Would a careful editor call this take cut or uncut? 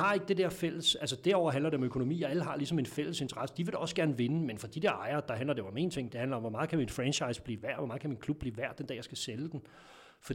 uncut